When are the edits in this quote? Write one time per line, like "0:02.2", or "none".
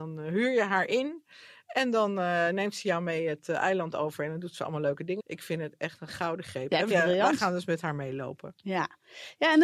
0:05.2
0:06.9